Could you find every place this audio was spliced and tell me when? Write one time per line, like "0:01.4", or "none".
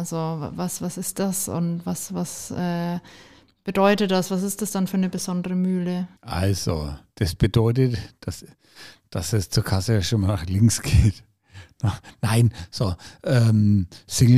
0:06.2